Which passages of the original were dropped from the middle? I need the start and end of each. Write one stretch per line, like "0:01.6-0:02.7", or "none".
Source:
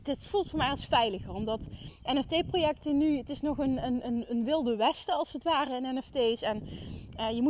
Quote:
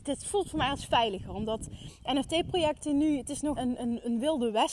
0:03.6-0:03.8